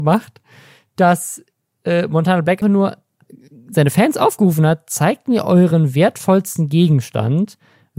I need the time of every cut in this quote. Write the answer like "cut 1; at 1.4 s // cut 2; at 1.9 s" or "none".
cut 1; at 2.6 s

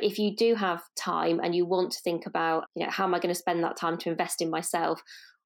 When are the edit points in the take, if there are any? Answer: cut 1; at 2.7 s

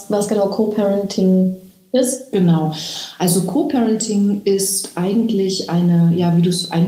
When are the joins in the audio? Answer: none

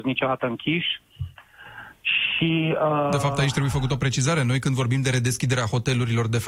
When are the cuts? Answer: none

